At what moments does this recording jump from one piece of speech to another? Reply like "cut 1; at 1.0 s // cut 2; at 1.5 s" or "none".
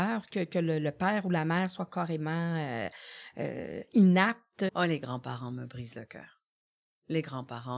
cut 1; at 4.7 s